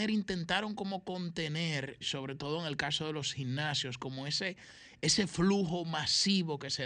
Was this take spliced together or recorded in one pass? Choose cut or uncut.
cut